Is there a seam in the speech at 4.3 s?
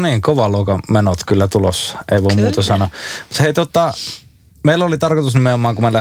no; 1 cut; at 1.2 s

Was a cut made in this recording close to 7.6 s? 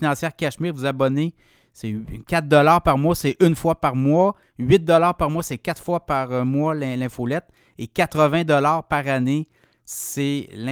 no; 0 cuts

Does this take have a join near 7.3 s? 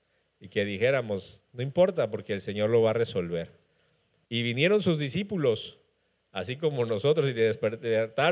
no; 1 cut; at 4.2 s

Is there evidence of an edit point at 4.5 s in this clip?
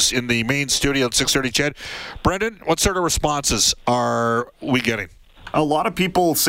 yes; 1 cut; at 4.5 s

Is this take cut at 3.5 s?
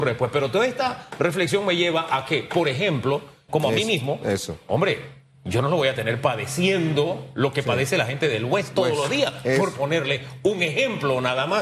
yes; 1 cut; at 3.5 s

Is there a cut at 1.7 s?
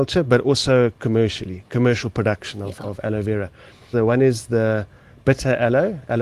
no; 1 cut; at 3.9 s

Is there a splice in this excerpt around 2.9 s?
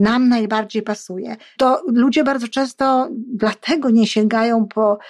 no; 1 cut; at 1.6 s

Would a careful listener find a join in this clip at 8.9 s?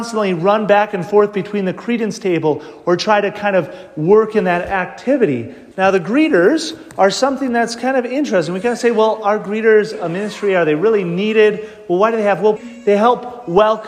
no; 2 cuts; at 5.7 s, 12.6 s

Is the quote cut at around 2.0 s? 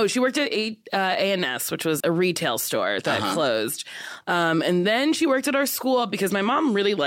yes; 1 cut; at 2.0 s

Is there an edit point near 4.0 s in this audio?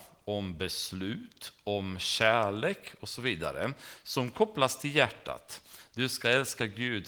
no; 0 cuts

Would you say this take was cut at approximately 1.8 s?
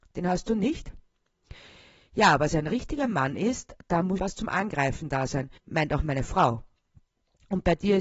no; 2 cuts; at 4.2 s, 5.6 s

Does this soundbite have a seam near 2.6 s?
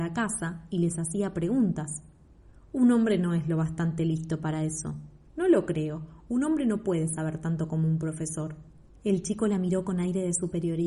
no; 2 cuts; at 5.3 s, 9.0 s

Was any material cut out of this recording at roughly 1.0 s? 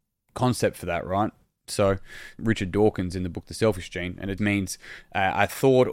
no; 2 cuts; at 2.4 s, 4.4 s

